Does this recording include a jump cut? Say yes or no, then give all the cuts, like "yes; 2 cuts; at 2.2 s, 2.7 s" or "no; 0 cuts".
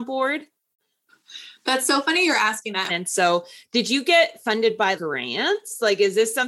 yes; 2 cuts; at 2.9 s, 5.0 s